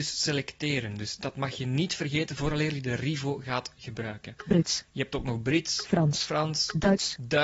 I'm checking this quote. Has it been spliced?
no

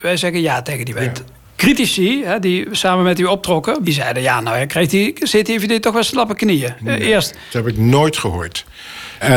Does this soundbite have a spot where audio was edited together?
no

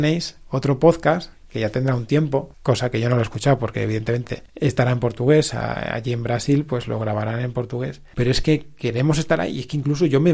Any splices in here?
yes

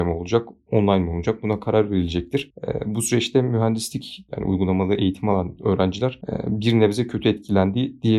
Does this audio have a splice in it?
yes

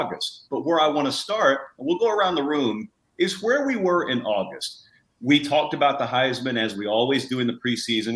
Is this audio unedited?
yes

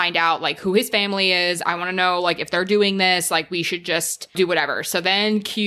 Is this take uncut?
yes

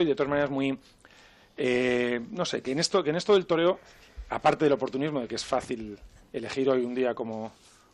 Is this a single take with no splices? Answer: yes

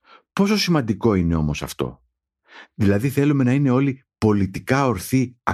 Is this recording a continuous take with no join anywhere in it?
yes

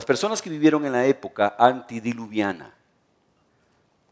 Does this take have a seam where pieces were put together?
no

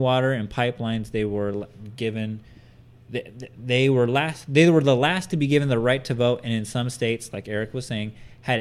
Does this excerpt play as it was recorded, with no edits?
yes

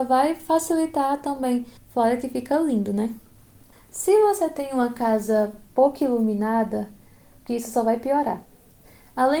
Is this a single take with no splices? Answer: no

